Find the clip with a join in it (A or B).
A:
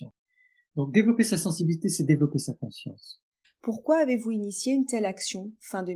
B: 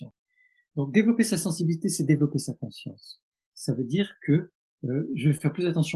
A